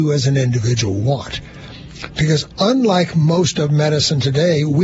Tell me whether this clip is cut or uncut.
uncut